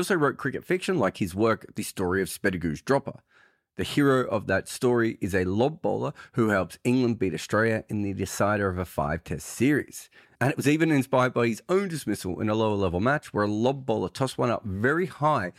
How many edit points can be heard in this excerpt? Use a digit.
0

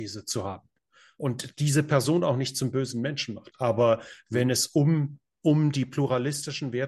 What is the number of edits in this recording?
1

